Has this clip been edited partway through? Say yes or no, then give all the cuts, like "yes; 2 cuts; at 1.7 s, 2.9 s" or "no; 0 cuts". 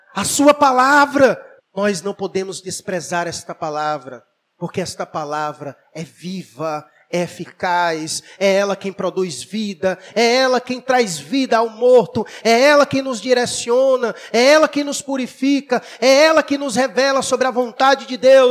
yes; 2 cuts; at 1.6 s, 10.1 s